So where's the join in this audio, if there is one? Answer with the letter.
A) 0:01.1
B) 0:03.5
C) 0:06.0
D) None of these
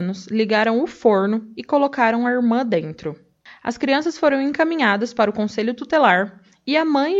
B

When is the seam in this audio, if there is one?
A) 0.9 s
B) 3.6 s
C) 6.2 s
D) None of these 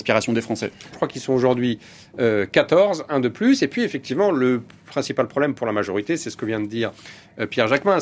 A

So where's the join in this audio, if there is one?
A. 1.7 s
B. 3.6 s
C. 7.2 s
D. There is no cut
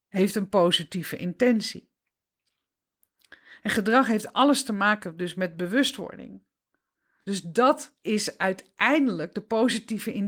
C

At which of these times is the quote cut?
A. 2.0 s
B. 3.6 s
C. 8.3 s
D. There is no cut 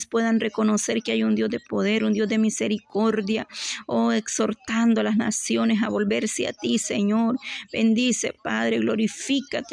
D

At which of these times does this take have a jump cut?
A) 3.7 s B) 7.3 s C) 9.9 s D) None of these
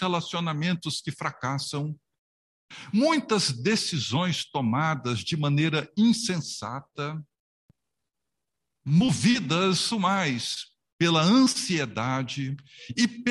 C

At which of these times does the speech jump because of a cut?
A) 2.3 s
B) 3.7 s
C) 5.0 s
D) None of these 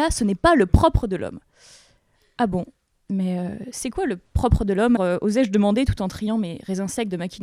C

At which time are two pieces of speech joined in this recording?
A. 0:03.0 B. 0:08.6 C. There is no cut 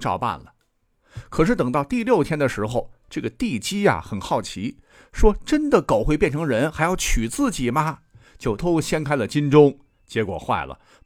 B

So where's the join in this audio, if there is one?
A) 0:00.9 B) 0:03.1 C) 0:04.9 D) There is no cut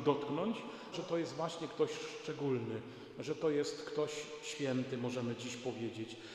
A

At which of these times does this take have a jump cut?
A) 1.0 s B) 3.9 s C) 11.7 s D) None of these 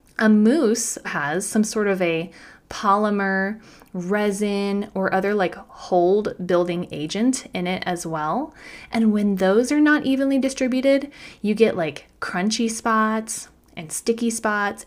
A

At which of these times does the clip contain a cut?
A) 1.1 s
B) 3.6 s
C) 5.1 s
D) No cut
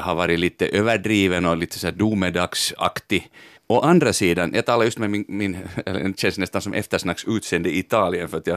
B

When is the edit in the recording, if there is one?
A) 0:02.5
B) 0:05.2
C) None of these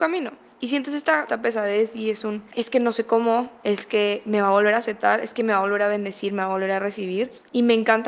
A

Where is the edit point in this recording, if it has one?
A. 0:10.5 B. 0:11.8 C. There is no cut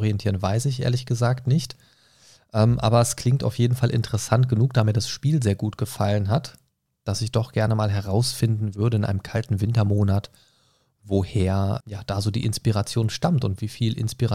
B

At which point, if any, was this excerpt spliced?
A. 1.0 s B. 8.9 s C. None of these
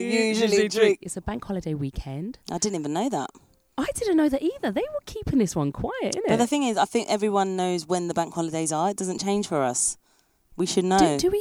A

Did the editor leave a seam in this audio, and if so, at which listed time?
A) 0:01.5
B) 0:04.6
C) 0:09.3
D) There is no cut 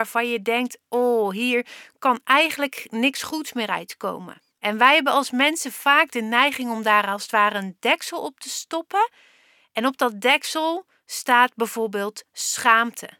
B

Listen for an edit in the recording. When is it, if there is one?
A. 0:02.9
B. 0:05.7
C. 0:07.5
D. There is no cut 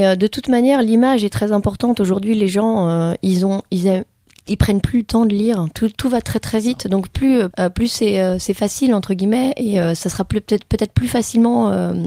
C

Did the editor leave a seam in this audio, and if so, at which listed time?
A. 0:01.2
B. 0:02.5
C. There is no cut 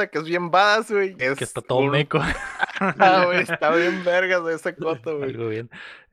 A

